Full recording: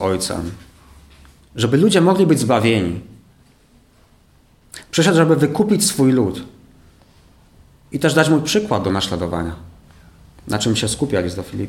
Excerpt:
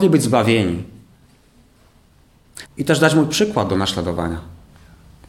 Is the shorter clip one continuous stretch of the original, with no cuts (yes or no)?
no